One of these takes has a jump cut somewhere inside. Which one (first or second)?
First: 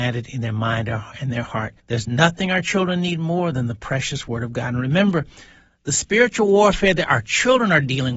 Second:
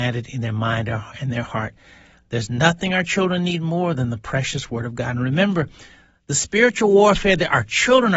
first